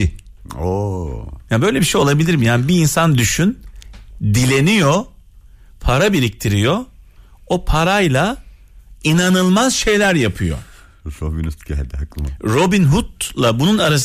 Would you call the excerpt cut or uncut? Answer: uncut